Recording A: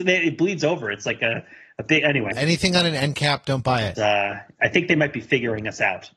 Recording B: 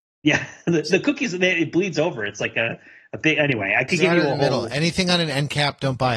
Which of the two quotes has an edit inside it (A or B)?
A